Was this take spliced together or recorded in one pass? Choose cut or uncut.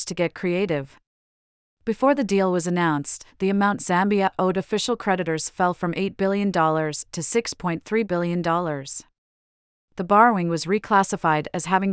uncut